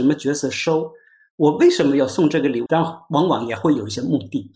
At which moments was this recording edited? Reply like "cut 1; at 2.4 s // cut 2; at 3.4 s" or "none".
cut 1; at 2.7 s